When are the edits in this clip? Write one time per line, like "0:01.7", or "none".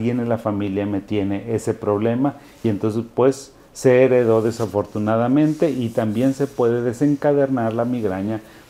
none